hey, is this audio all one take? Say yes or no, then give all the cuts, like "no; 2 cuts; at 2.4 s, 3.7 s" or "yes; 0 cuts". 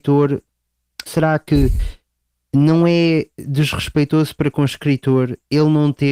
no; 1 cut; at 1.1 s